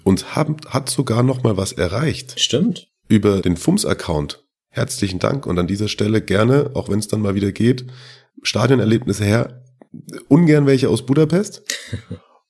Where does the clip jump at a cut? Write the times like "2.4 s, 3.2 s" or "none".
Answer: none